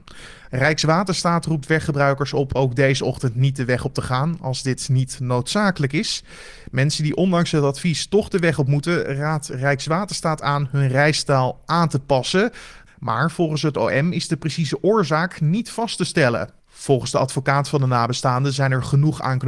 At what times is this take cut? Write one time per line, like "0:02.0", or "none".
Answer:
0:12.9